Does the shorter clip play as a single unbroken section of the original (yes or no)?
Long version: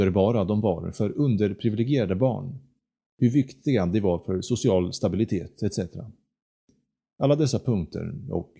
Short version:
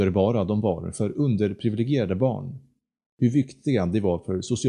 yes